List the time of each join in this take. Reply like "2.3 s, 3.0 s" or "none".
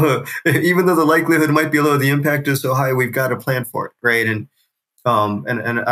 none